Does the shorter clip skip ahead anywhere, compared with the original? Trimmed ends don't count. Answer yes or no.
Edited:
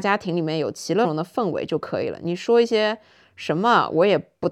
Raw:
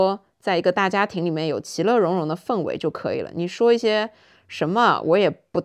yes